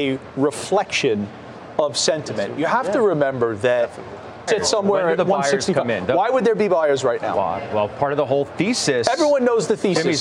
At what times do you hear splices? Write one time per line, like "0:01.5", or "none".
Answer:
0:04.5